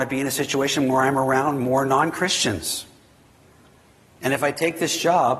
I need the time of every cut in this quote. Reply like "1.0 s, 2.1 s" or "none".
none